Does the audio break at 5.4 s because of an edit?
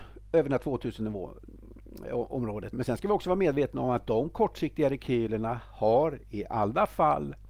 no; 1 cut; at 2.7 s

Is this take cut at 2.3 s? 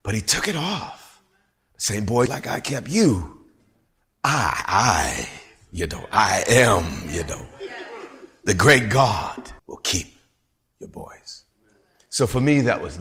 yes; 2 cuts; at 2.3 s, 9.6 s

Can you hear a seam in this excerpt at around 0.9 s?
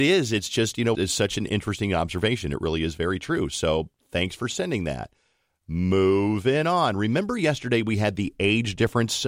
yes; 1 cut; at 0.9 s

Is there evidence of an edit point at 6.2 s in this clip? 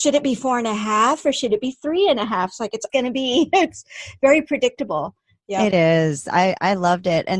no; 1 cut; at 2.9 s

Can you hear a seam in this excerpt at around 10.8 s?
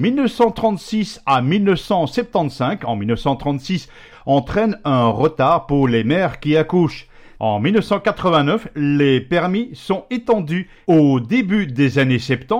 yes; 3 cuts; at 4.1 s, 7.4 s, 10.8 s

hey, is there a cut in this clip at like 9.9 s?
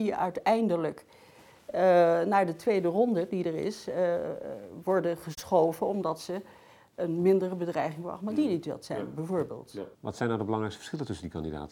yes; 1 cut; at 9.9 s

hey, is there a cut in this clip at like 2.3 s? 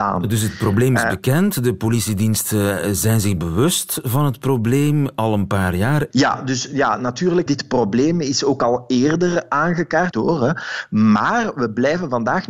no; 3 cuts; at 6.1 s, 7.5 s, 10.1 s

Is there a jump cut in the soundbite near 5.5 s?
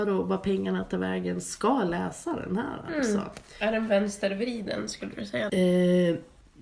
yes; 1 cut; at 5.5 s

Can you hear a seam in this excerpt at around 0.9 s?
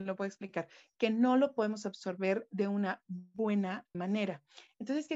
no; 1 cut; at 3.9 s

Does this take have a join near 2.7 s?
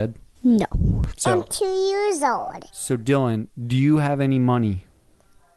yes; 2 cuts; at 1.1 s, 2.7 s

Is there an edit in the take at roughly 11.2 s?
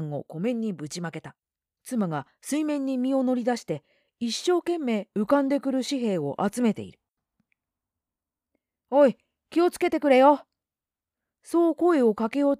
no; 1 cut; at 1.8 s

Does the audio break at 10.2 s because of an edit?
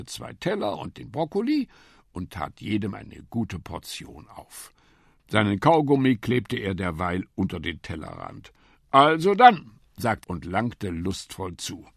yes; 1 cut; at 10.2 s

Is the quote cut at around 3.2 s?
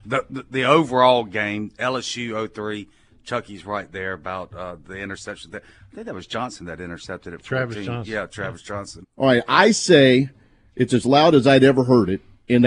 no; 1 cut; at 9.0 s

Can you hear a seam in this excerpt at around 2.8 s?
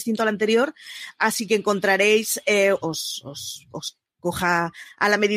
yes; 1 cut; at 2.8 s

